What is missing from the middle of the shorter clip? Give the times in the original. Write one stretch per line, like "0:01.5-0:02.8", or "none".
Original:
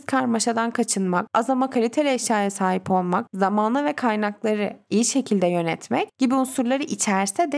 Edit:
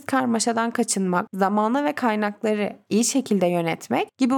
0:01.3-0:03.3